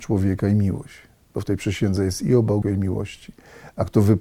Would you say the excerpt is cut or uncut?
cut